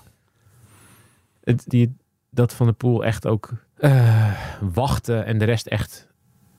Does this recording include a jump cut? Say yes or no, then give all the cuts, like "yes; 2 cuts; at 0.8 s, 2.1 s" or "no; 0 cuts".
yes; 2 cuts; at 1.7 s, 3.7 s